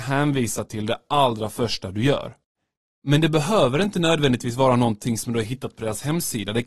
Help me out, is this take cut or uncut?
uncut